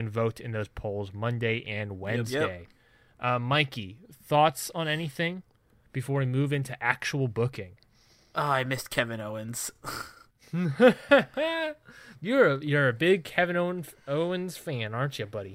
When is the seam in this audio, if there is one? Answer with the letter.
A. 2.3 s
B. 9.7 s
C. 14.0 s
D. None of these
D